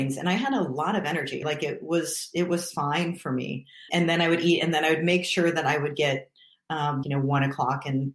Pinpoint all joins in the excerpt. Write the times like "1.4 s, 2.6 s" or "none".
1.4 s, 3.9 s, 7.0 s